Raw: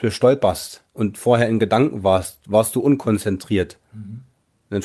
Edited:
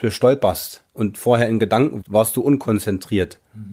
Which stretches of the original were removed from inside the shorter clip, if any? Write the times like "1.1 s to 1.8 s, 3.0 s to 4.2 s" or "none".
2.0 s to 2.4 s